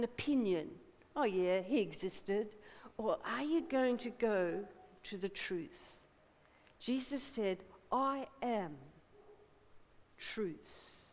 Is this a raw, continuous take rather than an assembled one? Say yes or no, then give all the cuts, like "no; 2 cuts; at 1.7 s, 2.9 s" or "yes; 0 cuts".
yes; 0 cuts